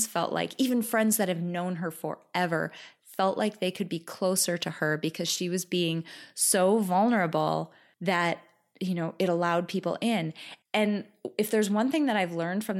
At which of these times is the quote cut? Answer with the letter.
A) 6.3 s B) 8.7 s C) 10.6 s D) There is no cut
C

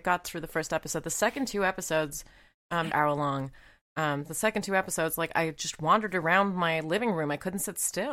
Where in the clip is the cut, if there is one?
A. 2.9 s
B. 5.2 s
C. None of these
A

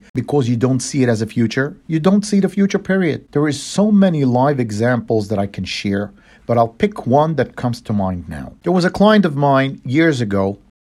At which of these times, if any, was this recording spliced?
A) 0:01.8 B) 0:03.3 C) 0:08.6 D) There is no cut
B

